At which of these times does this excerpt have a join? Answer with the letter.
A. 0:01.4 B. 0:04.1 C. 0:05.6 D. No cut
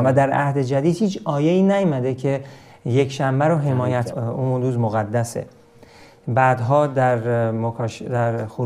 B